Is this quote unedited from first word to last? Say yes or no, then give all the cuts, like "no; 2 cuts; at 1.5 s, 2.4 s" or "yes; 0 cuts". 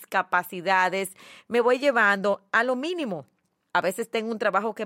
no; 1 cut; at 3.7 s